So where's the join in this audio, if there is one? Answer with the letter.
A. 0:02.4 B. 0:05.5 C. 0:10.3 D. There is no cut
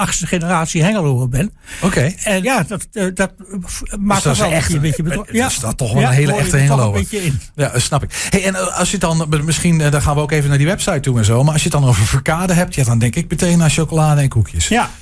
A